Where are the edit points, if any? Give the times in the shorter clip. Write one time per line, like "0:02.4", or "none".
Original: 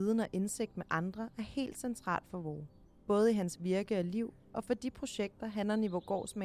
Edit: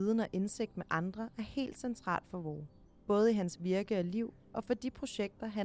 none